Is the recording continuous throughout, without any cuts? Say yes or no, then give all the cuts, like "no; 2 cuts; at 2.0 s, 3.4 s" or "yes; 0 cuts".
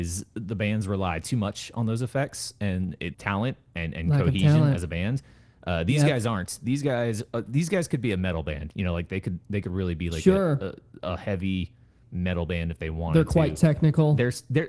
no; 1 cut; at 3.1 s